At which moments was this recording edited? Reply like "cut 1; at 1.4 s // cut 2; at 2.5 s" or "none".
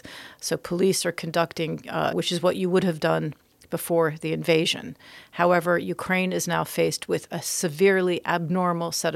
cut 1; at 2.1 s